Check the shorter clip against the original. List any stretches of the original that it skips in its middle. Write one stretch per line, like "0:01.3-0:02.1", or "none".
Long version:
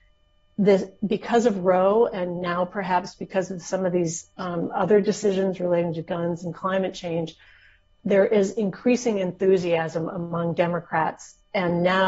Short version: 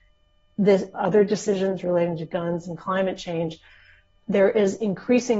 0:00.9-0:04.7